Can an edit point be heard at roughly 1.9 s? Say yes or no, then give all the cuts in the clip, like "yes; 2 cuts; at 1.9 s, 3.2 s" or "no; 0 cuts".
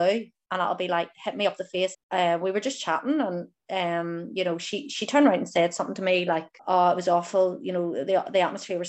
yes; 2 cuts; at 1.9 s, 6.6 s